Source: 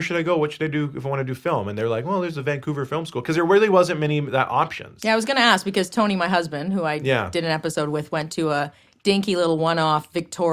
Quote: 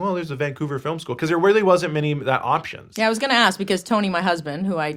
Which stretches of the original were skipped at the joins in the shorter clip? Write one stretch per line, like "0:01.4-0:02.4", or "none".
none